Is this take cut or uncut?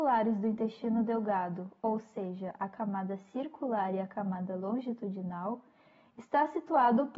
uncut